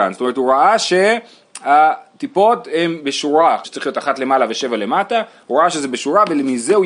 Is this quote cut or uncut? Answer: cut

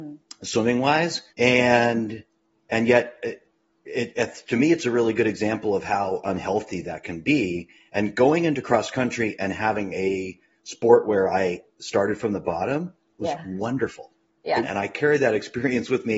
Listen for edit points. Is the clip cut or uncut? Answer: cut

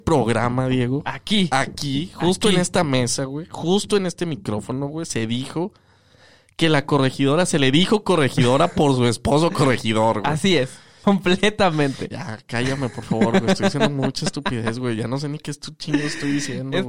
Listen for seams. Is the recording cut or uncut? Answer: cut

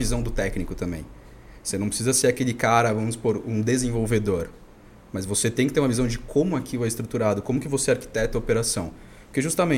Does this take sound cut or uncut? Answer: uncut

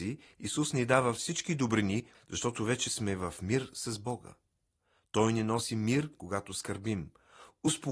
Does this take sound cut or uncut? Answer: cut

